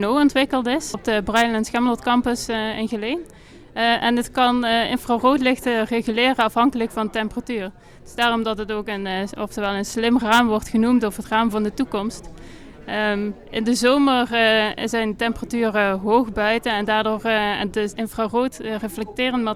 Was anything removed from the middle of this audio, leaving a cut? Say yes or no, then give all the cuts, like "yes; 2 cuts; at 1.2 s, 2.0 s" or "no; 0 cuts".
yes; 2 cuts; at 0.9 s, 18.0 s